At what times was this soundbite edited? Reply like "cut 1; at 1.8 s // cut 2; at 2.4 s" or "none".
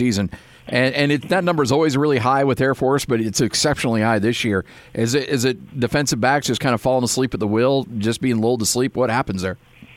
none